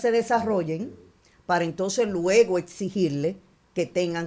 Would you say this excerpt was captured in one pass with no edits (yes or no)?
yes